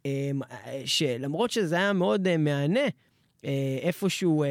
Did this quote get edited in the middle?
no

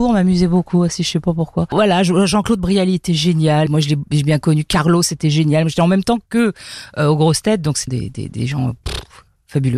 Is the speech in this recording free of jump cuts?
no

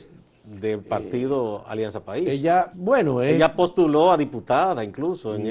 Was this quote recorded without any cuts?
no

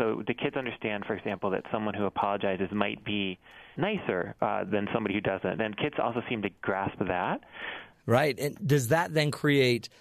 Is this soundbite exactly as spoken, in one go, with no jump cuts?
no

